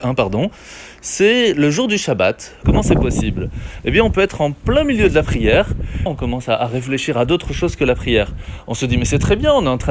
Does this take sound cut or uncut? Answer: cut